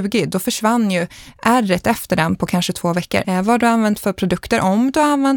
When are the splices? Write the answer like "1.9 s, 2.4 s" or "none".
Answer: 3.2 s